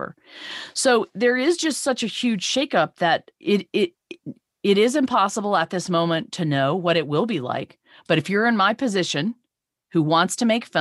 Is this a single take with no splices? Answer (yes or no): no